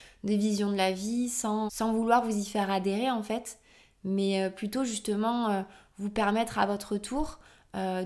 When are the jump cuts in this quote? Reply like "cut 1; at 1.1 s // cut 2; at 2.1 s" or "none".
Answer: cut 1; at 1.7 s